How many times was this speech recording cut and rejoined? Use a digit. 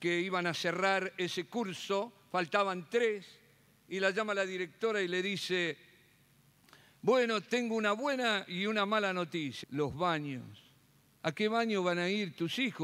2